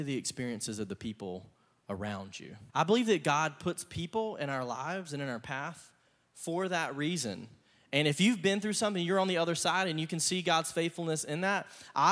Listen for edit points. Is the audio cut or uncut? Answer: cut